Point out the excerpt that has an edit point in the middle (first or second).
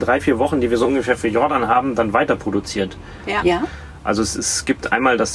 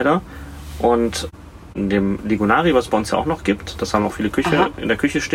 first